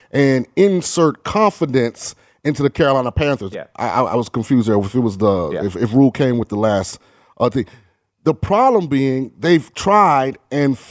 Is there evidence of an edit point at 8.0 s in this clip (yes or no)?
no